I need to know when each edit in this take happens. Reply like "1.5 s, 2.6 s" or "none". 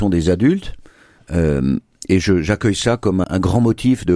1.2 s, 3.2 s